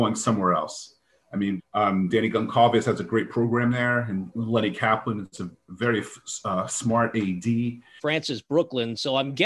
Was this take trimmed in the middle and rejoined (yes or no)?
yes